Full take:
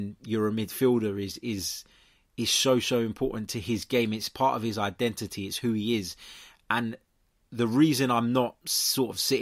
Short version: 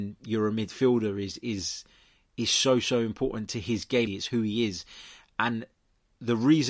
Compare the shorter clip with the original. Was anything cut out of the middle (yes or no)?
yes